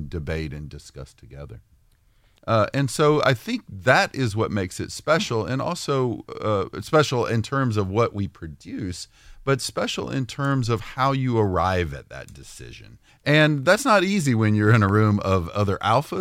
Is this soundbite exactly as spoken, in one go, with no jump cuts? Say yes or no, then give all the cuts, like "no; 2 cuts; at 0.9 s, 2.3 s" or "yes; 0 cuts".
no; 2 cuts; at 2.4 s, 13.1 s